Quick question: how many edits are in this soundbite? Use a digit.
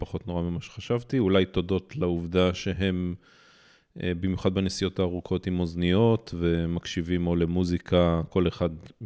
0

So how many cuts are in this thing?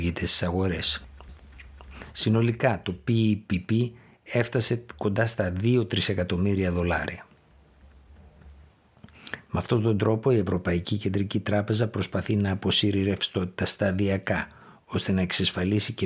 1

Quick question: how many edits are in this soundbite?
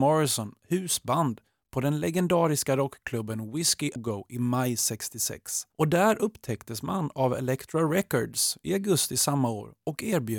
2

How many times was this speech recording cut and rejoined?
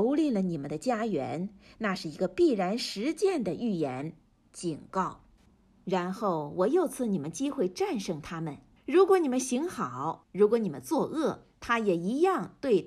2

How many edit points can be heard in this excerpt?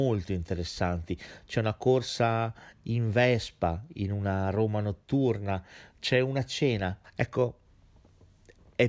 1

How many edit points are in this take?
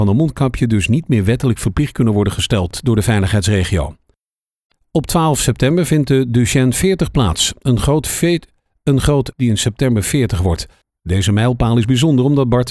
1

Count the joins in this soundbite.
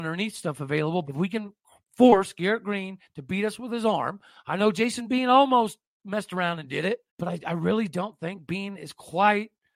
2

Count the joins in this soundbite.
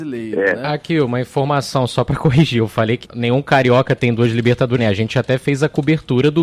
2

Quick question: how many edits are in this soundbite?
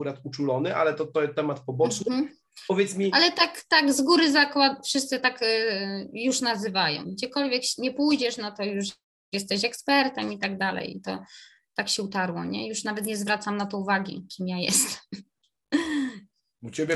0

